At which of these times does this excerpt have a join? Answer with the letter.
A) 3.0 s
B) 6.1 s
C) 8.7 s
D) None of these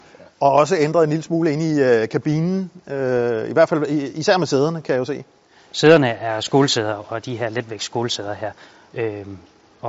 D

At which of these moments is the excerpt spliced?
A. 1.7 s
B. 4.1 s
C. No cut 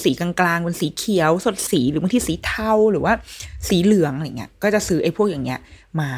A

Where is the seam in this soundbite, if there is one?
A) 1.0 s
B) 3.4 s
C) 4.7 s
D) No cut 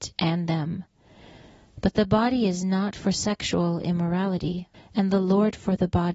C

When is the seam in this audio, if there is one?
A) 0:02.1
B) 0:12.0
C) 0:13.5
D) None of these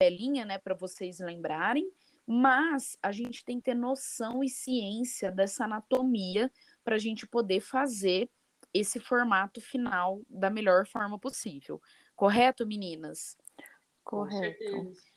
D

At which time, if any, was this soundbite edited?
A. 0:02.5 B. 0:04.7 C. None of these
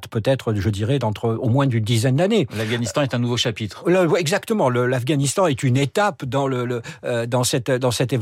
C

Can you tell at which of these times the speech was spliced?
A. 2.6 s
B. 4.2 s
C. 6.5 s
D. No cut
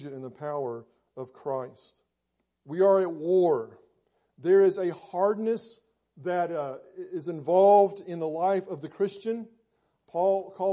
A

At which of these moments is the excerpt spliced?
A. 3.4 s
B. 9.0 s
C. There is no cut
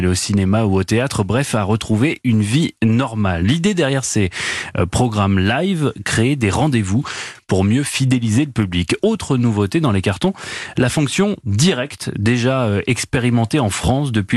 A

